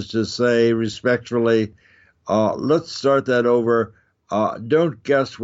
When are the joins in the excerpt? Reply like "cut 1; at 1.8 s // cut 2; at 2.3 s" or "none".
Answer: none

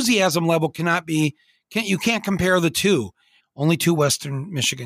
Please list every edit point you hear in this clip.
cut 1; at 3.4 s

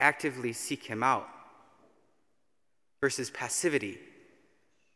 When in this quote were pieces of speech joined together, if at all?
none

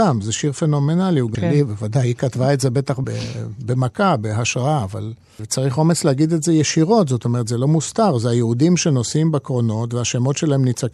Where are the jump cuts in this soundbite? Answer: cut 1; at 1.3 s // cut 2; at 3.0 s // cut 3; at 5.4 s

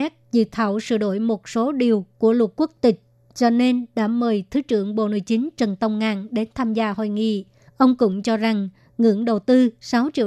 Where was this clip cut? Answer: cut 1; at 7.7 s

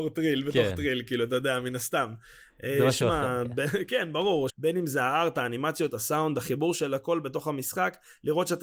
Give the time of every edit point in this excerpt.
cut 1; at 4.5 s

